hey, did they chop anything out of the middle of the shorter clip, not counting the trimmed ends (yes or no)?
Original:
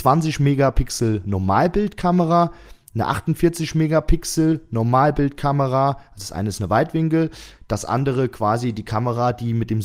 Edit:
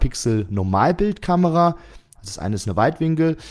yes